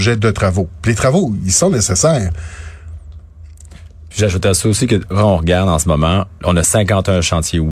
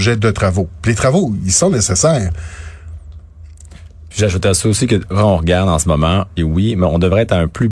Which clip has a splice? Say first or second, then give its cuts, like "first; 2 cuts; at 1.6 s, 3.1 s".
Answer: second; 1 cut; at 6.4 s